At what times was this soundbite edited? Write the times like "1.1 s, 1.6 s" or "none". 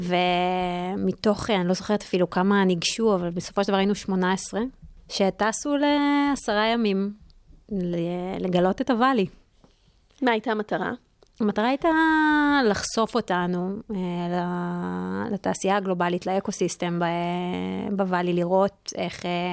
5.0 s